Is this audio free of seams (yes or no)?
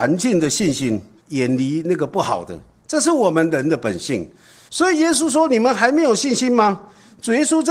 no